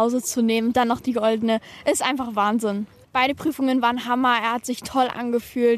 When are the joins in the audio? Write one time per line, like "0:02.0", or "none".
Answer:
0:03.0